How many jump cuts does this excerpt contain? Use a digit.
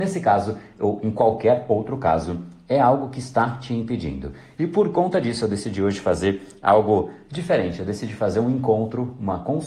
0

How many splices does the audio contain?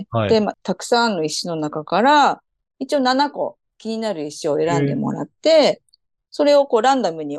0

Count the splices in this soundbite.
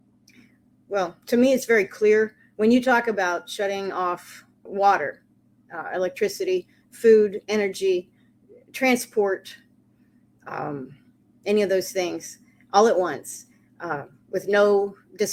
1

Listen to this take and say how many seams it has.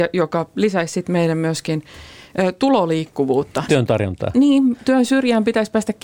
1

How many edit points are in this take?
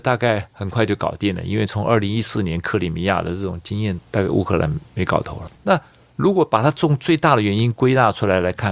2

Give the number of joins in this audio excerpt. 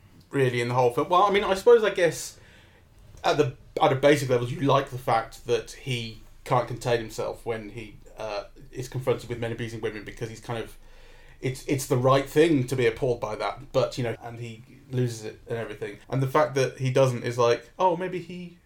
2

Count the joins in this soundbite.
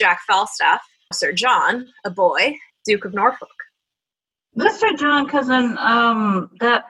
2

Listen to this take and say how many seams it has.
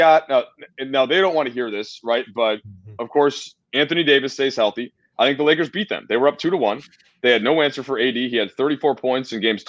0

